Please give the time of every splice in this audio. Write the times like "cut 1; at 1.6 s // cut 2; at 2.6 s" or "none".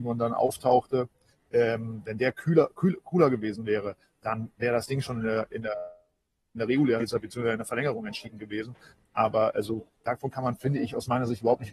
none